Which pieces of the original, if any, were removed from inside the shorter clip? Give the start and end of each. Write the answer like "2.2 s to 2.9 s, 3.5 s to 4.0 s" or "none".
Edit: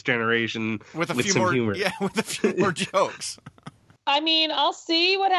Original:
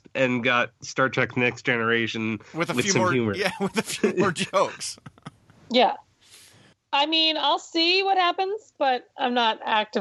5.6 s to 6.8 s